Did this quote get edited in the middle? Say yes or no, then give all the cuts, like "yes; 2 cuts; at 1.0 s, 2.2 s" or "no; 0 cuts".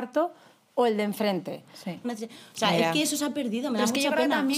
yes; 1 cut; at 2.0 s